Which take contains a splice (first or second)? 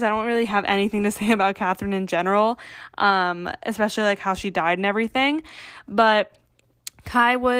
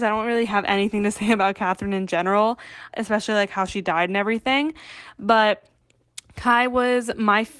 second